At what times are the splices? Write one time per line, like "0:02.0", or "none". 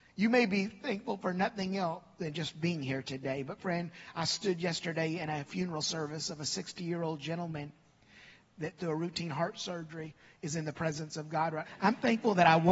0:08.8
0:11.6